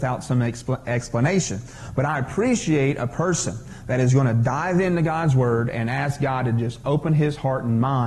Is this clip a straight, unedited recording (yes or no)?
yes